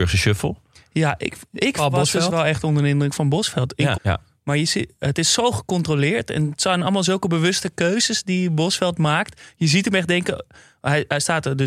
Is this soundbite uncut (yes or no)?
no